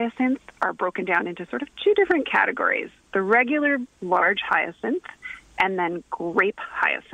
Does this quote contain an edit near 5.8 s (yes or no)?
no